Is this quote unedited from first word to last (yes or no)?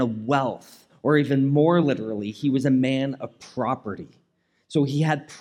yes